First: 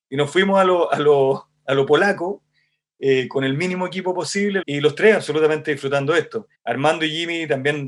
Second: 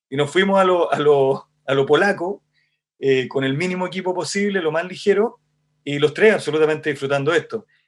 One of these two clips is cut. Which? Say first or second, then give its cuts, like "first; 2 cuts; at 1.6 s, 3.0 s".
first; 2 cuts; at 4.6 s, 6.5 s